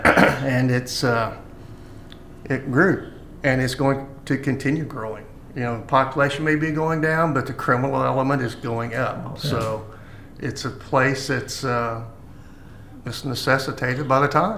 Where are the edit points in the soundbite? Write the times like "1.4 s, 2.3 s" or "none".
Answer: none